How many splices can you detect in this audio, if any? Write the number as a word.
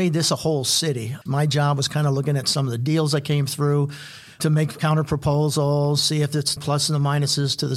two